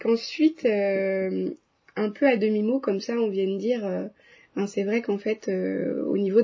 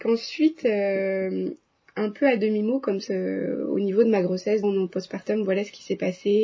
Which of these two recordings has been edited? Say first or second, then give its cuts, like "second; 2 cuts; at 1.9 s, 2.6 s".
second; 2 cuts; at 3.1 s, 4.6 s